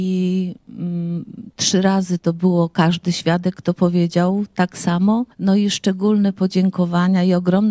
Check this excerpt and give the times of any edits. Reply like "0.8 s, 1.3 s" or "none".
5.3 s